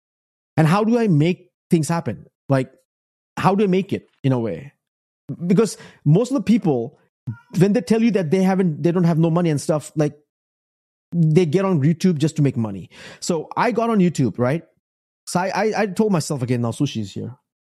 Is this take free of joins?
yes; 0 cuts

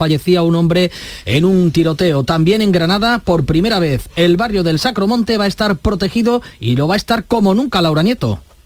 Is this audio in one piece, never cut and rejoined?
yes; 0 cuts

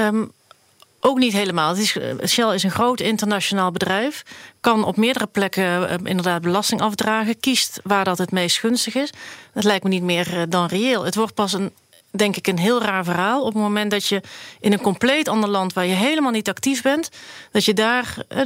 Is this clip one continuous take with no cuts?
yes; 0 cuts

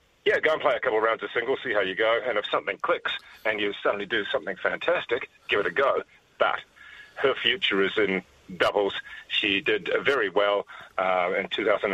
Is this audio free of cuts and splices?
yes; 0 cuts

